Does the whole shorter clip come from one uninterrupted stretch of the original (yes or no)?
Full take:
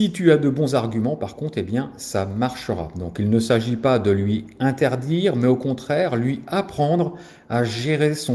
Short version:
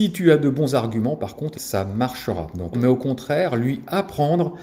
no